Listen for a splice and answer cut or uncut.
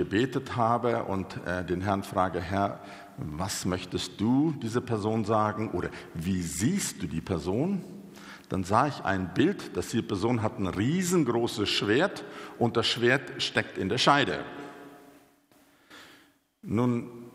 uncut